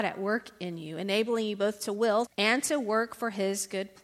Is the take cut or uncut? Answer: cut